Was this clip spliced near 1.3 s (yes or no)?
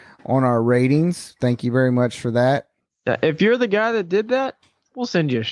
no